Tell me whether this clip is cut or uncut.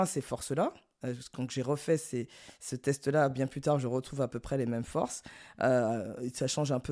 uncut